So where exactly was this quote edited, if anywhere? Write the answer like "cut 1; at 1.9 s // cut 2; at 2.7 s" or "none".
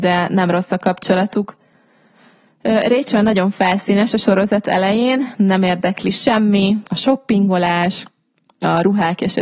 cut 1; at 6.9 s